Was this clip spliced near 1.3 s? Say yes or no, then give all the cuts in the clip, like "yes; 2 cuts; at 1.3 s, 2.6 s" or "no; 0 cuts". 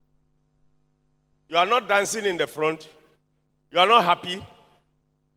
yes; 1 cut; at 1.3 s